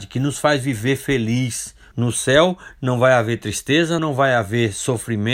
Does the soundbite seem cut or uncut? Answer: cut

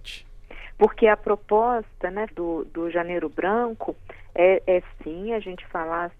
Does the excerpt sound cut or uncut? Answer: cut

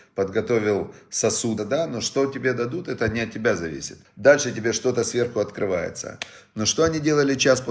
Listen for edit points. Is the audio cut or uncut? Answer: cut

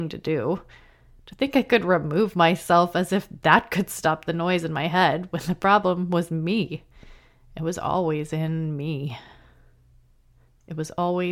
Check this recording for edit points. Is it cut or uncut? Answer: uncut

